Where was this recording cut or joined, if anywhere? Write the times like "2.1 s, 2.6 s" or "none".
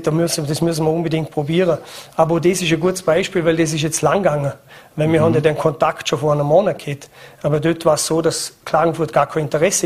none